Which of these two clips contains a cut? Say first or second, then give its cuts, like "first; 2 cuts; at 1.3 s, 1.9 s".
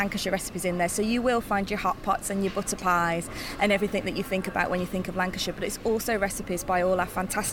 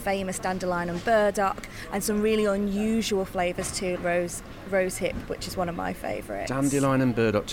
second; 2 cuts; at 4.0 s, 5.3 s